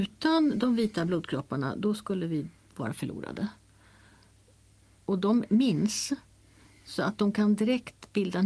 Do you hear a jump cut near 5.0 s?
yes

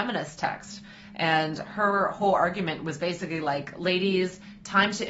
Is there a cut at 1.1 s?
no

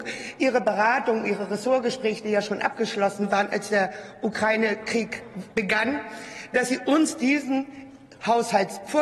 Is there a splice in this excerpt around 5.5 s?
yes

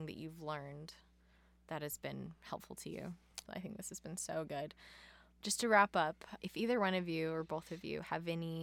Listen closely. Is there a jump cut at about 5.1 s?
no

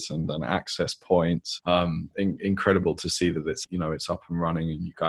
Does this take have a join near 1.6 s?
yes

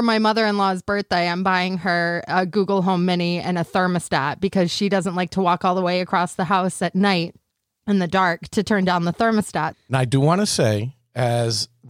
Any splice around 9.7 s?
yes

